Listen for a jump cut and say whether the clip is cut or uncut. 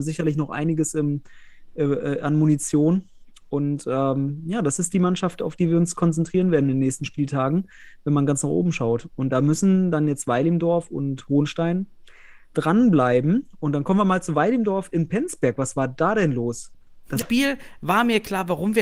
cut